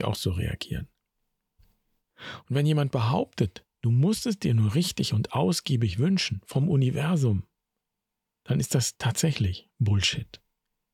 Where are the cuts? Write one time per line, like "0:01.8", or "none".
0:02.0